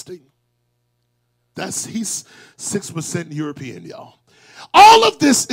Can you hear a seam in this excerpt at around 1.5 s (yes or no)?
yes